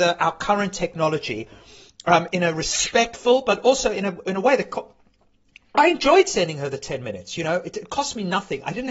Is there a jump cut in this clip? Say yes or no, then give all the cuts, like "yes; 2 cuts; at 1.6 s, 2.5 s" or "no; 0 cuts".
no; 0 cuts